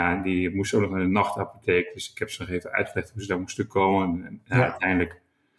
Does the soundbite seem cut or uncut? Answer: uncut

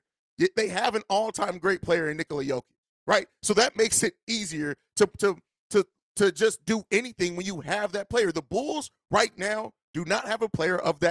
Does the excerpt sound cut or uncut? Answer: uncut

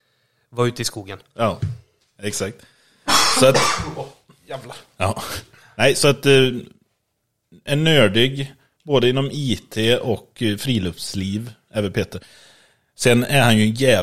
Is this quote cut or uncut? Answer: uncut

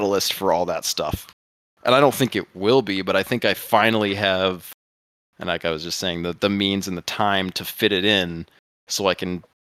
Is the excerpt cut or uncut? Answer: uncut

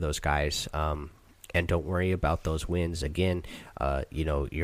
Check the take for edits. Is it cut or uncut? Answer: uncut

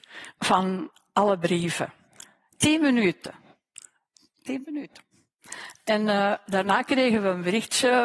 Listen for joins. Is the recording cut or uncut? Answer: uncut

